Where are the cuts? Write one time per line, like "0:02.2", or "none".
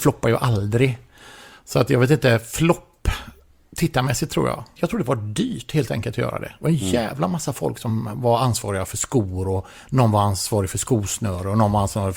0:04.8